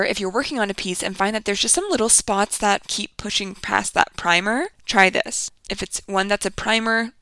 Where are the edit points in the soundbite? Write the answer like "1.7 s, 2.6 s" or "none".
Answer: 2.8 s, 5.6 s